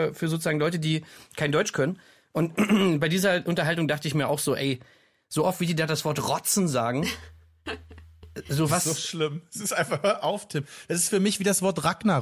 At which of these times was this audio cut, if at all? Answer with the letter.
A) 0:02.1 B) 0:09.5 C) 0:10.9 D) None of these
D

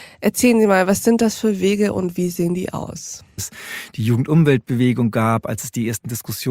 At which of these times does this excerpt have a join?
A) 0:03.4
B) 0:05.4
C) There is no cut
A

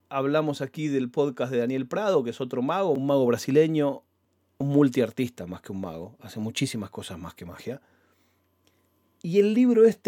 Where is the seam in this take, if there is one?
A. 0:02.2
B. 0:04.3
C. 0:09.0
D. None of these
D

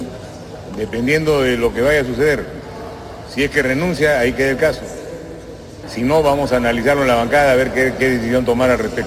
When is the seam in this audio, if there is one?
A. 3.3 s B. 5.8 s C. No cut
B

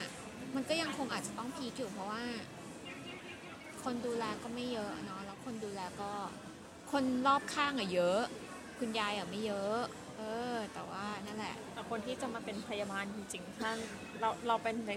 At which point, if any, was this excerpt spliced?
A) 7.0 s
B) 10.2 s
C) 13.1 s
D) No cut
D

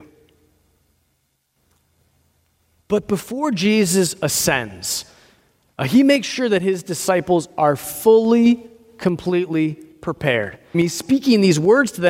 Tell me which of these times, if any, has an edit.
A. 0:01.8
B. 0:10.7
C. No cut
B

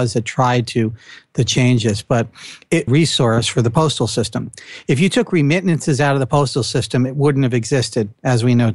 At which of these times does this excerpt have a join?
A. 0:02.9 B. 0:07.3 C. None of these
A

